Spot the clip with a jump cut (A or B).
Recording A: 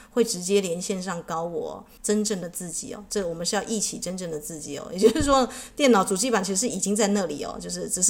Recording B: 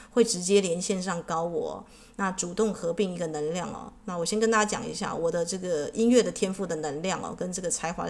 A